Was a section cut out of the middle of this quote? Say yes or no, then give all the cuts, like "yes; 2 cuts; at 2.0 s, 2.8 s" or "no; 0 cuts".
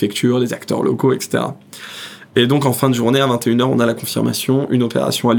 no; 0 cuts